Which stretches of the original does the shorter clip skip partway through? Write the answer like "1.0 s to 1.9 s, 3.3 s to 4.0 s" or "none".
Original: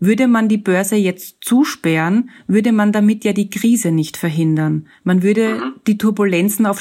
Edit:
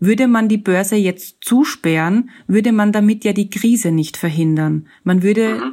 none